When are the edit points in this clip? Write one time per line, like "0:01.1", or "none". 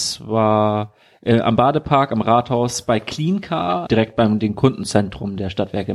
0:03.9

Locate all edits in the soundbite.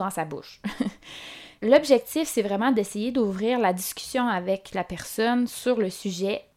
0:01.6

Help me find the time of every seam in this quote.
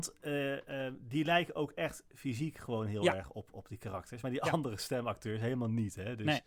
none

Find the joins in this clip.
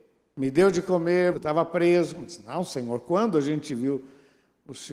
0:01.3

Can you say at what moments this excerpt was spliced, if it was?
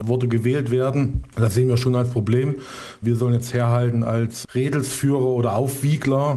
0:03.0

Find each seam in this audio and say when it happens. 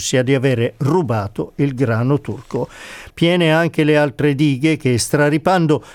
0:03.1

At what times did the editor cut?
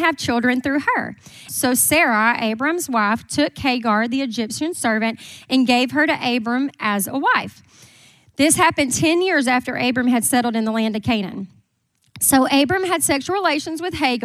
0:01.5

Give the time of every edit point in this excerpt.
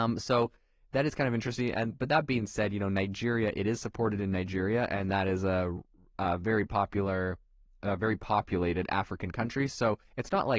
none

